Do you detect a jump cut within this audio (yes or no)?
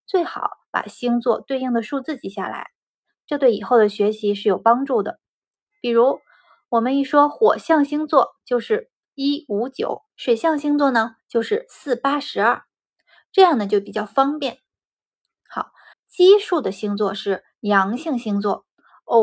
yes